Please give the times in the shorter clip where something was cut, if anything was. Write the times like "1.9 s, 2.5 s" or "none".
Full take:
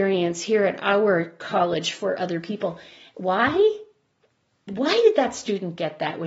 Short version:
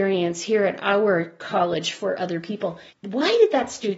2.9 s